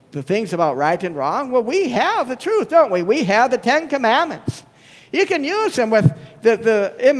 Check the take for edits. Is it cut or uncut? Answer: uncut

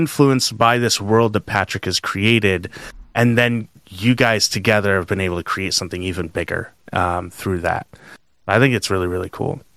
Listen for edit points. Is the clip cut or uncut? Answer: uncut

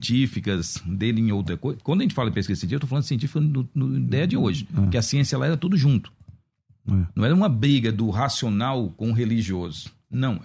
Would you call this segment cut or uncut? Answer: uncut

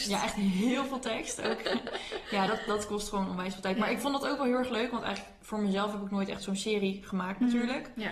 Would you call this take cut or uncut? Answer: uncut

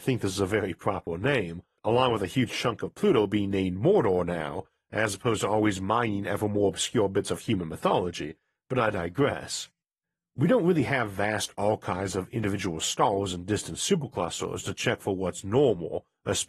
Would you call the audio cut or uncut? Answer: uncut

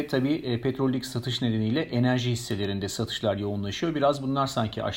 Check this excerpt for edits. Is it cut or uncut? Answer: uncut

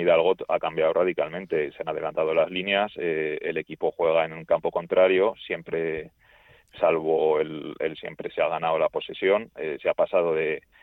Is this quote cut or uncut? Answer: cut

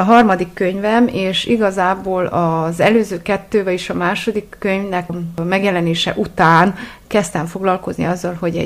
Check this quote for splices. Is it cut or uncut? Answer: cut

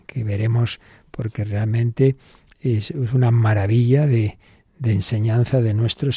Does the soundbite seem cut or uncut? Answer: uncut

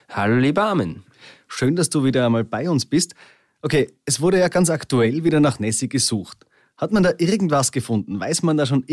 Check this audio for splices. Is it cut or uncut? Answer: uncut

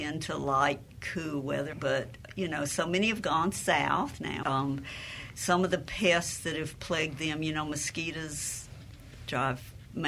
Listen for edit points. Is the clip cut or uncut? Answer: cut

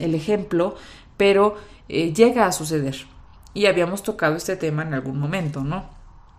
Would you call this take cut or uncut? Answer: uncut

